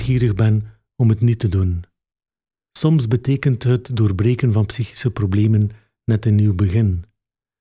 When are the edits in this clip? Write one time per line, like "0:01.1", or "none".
0:02.7